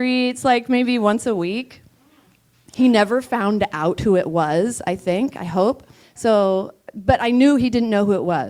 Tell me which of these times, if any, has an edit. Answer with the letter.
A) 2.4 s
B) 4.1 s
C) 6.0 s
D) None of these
C